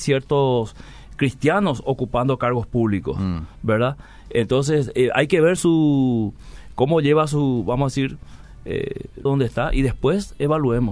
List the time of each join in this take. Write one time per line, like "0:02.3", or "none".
0:05.6
0:09.3

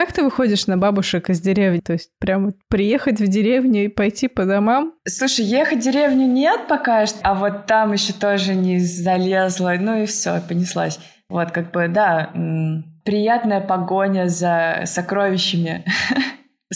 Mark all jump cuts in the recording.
0:01.8
0:07.2

